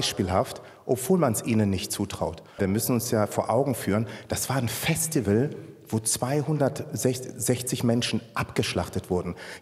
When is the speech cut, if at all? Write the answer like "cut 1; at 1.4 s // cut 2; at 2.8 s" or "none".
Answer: cut 1; at 2.6 s